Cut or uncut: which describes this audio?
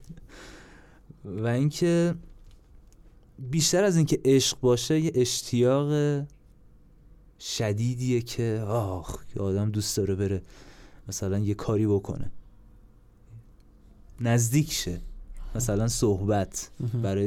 uncut